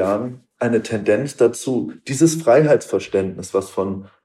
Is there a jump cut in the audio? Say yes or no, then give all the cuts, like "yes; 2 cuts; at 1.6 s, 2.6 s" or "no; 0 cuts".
no; 0 cuts